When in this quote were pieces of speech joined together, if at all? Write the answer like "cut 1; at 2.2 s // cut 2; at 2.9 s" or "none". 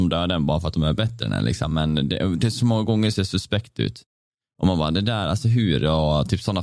none